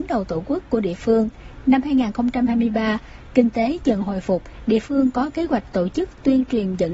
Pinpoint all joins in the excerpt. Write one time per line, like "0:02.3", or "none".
none